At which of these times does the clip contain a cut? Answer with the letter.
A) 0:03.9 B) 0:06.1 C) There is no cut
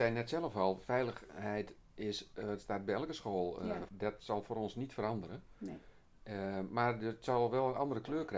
A